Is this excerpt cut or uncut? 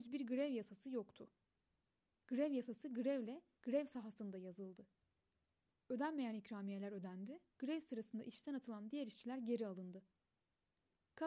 cut